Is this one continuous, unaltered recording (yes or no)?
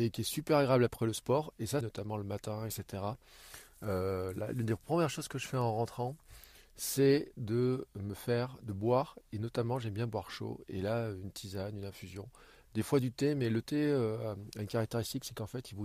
no